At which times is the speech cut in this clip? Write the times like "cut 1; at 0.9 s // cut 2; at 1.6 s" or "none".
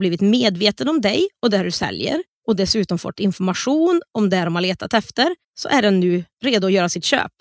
cut 1; at 5.4 s